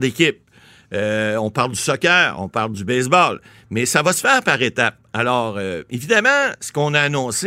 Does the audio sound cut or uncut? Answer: uncut